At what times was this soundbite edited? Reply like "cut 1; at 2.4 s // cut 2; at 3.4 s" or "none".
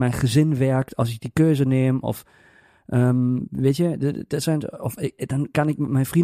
none